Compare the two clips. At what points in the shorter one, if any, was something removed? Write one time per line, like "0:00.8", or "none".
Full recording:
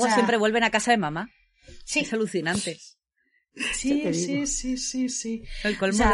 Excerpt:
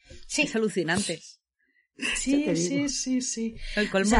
0:02.9